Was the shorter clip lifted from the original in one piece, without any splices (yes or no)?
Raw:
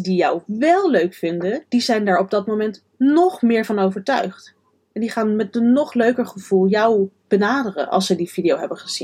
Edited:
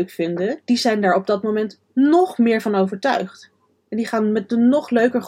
yes